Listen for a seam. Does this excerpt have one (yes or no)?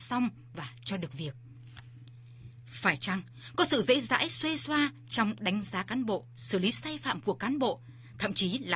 no